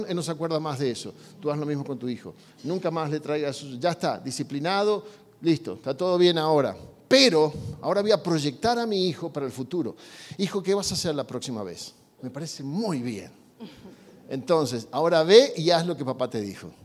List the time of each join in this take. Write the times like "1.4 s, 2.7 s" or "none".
12.2 s